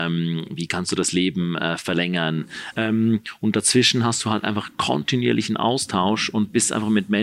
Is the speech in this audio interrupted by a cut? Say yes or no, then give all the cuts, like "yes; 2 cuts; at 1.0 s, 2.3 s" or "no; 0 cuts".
yes; 1 cut; at 2.7 s